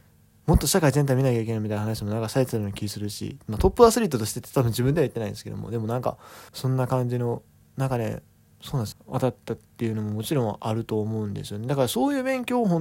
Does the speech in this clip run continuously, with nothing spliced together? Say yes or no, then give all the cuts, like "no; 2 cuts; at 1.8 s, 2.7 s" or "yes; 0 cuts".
no; 2 cuts; at 6.5 s, 8.9 s